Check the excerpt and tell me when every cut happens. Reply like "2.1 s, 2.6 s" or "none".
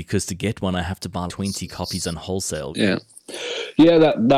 1.3 s, 2.7 s